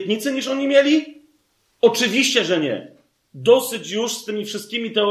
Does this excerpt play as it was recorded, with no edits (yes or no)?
yes